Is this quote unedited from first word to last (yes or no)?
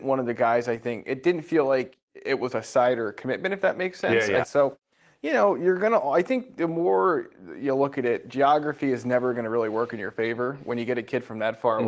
no